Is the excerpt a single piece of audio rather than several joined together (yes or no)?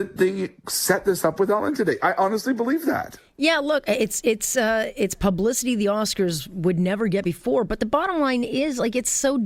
yes